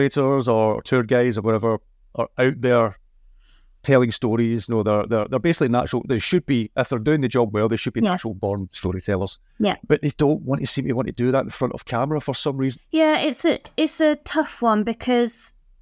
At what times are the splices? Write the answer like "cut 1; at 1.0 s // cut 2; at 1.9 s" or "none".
cut 1; at 9.5 s // cut 2; at 12.8 s